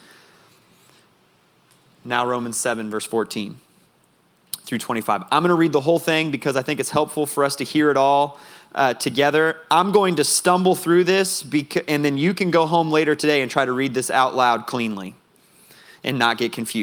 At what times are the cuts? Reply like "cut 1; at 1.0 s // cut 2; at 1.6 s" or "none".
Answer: none